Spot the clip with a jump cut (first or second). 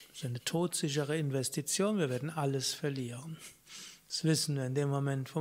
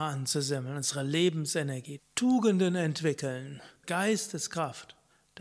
second